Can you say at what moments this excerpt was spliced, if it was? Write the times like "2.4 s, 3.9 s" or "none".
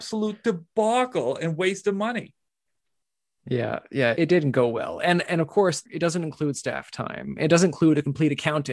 4.1 s, 5.8 s